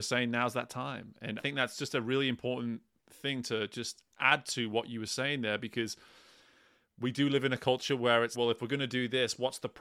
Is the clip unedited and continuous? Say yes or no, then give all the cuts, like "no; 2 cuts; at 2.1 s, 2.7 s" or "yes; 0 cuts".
no; 2 cuts; at 1.4 s, 8.3 s